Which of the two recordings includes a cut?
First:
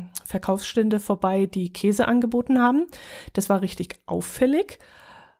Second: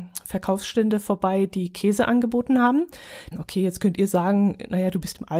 second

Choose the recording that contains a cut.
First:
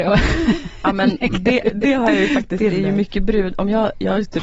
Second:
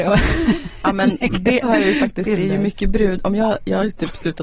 second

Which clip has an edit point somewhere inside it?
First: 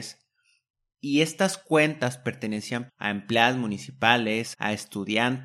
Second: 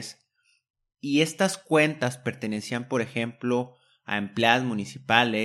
first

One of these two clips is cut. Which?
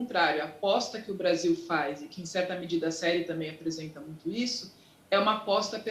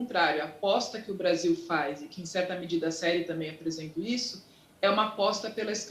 second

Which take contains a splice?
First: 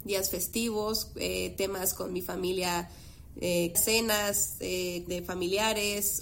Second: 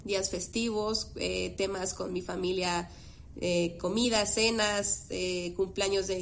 first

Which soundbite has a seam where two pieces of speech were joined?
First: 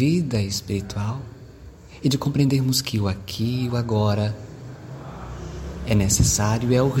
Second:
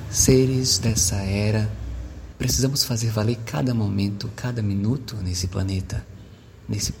second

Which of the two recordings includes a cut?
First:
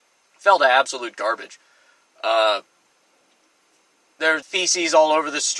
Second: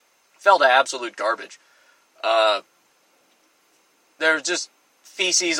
first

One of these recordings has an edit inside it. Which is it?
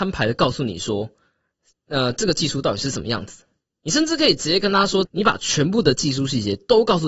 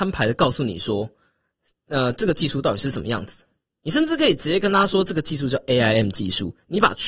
first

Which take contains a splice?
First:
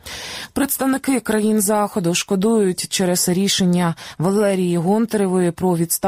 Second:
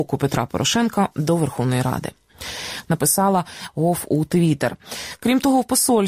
second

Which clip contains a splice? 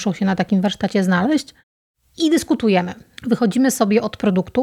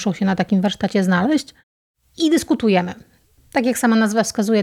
first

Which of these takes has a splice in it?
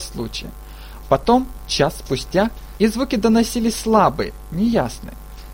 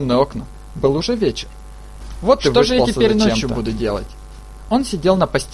first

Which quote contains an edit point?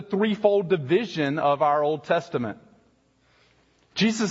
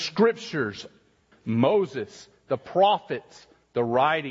second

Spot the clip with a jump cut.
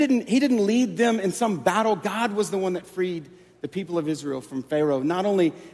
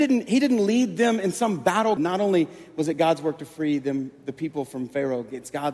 second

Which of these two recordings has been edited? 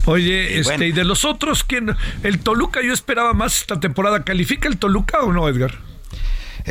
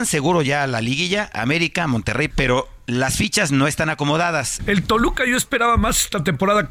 second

